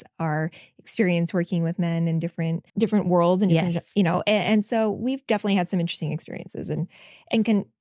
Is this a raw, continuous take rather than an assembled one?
no; 1 cut; at 2.7 s

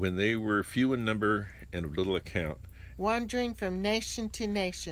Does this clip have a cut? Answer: yes; 1 cut; at 3.0 s

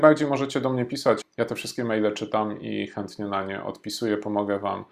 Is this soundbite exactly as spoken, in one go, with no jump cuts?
no; 1 cut; at 1.2 s

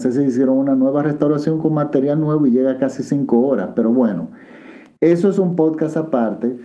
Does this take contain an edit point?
no; 0 cuts

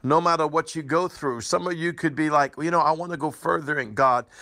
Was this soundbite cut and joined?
no; 0 cuts

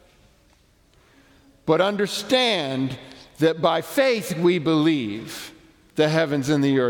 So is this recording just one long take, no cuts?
yes; 0 cuts

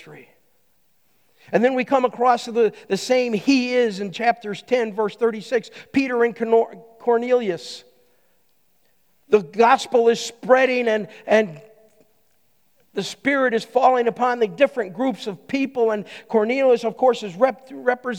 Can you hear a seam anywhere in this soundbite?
no; 0 cuts

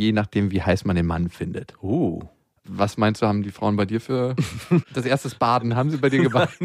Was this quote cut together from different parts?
yes; 1 cut; at 4.8 s

